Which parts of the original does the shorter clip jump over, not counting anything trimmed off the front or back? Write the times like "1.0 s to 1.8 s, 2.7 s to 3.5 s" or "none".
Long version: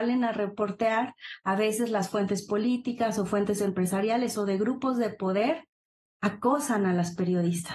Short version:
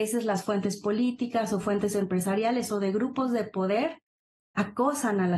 none

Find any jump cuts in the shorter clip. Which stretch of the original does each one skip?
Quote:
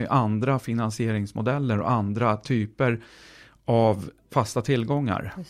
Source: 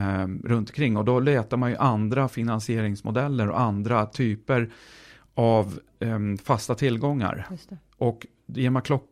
6.0 s to 6.4 s

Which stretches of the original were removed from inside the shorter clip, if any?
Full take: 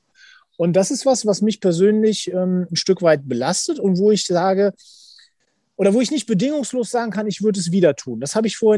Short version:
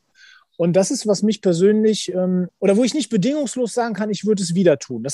1.0 s to 1.2 s, 2.7 s to 5.7 s

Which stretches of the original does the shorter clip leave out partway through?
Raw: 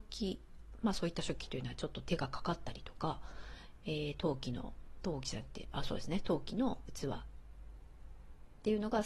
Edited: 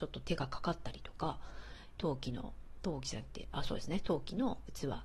3.8 s to 4.2 s

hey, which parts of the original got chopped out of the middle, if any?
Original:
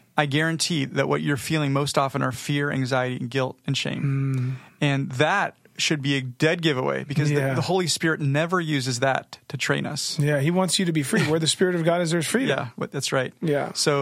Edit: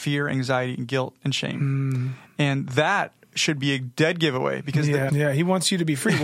7.5 s to 10.2 s

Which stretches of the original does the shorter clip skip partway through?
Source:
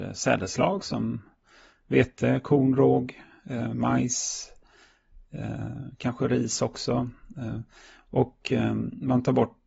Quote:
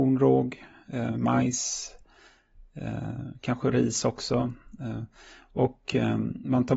none

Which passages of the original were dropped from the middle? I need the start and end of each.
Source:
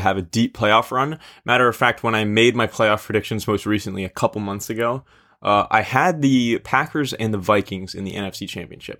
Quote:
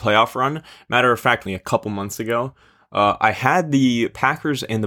2.0 s to 4.0 s

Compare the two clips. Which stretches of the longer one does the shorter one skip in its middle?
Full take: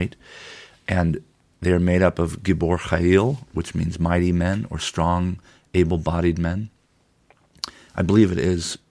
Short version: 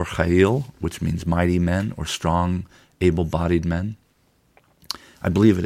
none

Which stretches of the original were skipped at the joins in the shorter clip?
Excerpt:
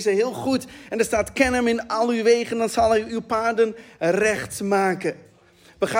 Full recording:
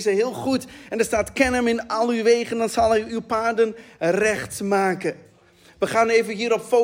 none

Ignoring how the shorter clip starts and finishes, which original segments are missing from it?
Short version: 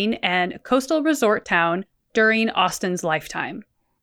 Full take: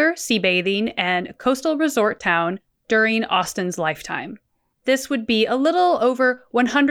none

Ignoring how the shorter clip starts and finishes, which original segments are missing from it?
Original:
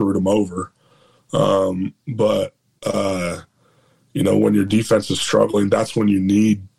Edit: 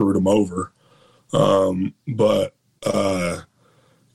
none

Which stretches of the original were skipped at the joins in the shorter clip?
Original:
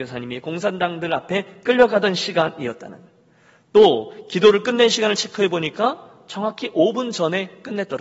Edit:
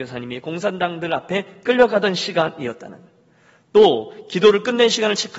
none

